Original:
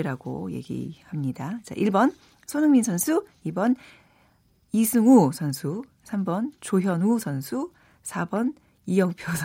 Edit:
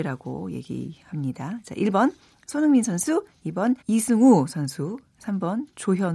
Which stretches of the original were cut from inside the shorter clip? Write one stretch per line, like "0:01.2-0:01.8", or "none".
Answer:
0:03.8-0:04.6